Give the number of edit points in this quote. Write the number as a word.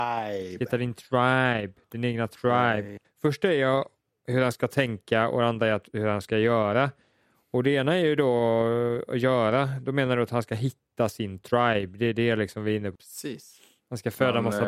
one